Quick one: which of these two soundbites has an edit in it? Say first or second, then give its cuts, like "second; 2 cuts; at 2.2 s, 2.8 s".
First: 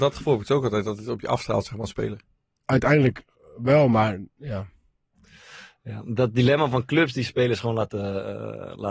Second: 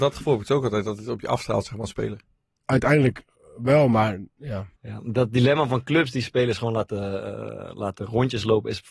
second; 1 cut; at 4.8 s